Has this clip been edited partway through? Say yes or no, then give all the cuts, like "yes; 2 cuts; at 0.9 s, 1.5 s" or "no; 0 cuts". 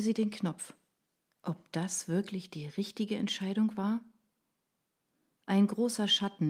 yes; 1 cut; at 1.3 s